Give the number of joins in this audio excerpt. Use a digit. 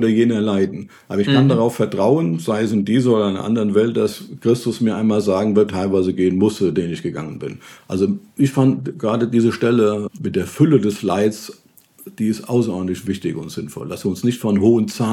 2